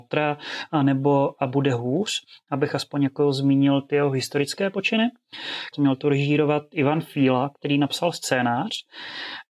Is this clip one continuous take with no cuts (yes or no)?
no